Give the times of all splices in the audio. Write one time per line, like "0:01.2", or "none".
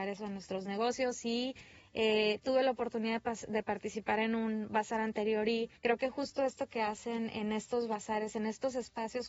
0:05.8